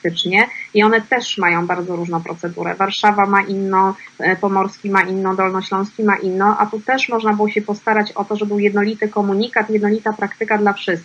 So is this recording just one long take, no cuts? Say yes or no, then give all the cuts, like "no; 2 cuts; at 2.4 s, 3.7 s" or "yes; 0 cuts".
yes; 0 cuts